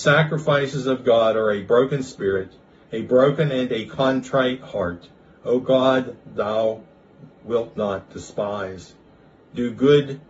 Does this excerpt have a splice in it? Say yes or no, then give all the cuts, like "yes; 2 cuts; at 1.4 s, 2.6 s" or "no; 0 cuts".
no; 0 cuts